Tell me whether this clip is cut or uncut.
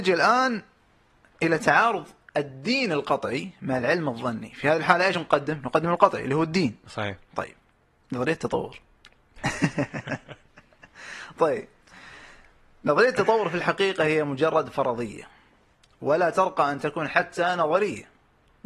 uncut